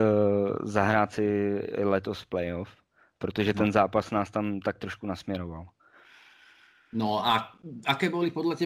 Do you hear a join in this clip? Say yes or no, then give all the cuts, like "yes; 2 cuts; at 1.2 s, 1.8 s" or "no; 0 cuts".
no; 0 cuts